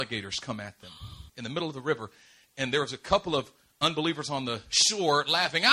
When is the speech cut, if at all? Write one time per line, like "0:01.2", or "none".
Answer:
0:01.3